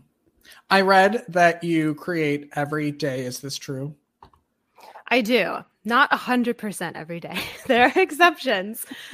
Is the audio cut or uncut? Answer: uncut